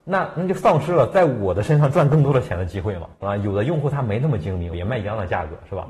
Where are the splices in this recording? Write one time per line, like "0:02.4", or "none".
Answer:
0:03.2
0:04.7

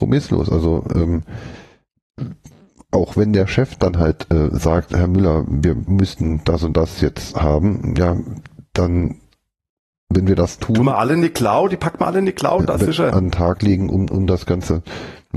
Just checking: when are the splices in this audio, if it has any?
0:13.1

